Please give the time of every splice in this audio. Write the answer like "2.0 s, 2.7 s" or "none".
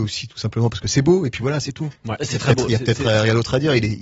none